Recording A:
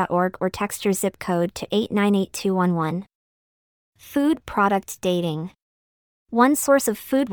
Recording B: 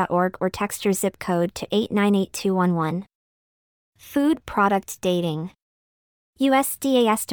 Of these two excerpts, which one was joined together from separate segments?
A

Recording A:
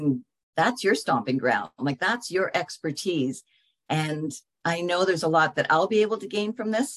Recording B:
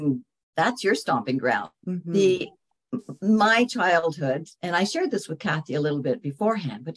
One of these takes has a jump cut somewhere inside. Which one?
B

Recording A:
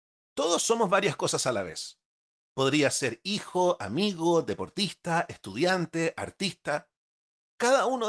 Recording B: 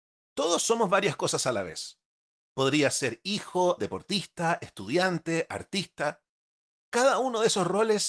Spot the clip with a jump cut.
B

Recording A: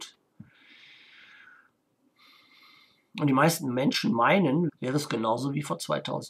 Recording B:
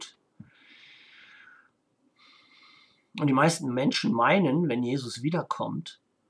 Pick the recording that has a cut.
A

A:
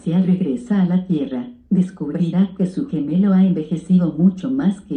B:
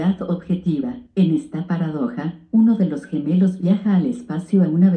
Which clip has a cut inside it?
B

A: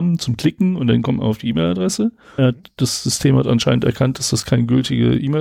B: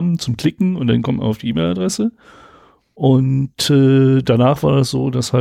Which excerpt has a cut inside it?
A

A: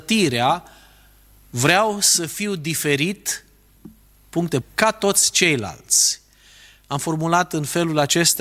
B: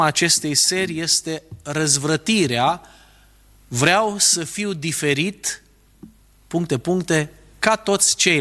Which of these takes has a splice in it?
A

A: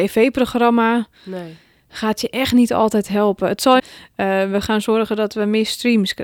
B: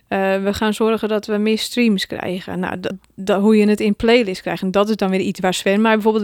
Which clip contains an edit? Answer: A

